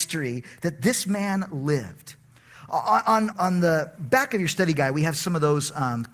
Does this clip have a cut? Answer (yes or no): yes